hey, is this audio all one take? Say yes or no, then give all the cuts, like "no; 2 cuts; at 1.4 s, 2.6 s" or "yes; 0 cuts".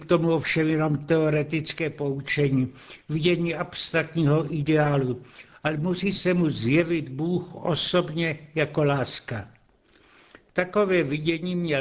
yes; 0 cuts